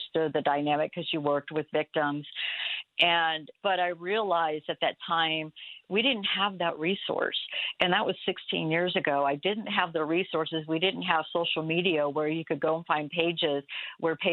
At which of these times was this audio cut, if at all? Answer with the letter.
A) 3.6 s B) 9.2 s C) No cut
A